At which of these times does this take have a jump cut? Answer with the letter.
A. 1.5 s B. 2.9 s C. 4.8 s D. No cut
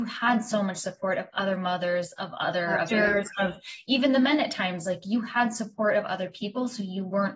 B